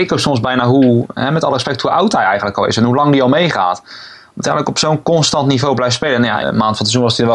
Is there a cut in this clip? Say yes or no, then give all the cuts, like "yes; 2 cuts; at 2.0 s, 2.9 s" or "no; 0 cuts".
yes; 1 cut; at 6.4 s